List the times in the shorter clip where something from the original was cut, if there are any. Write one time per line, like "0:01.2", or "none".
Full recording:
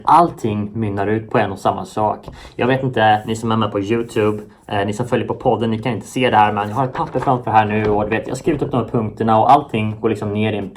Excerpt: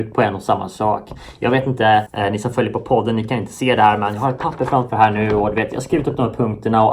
0:02.1